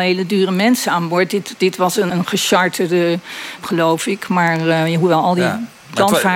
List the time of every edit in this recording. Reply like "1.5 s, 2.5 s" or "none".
2.1 s, 3.6 s